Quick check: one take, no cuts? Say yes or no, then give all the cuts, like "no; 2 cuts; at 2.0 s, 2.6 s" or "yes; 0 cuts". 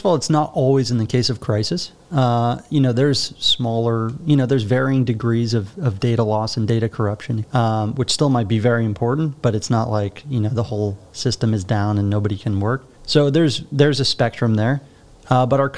no; 2 cuts; at 7.4 s, 12.9 s